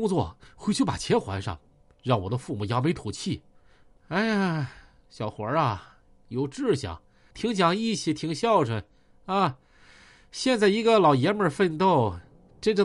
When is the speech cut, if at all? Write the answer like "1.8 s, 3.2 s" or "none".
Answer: 4.0 s